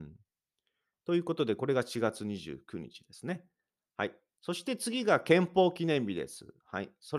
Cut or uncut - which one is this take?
uncut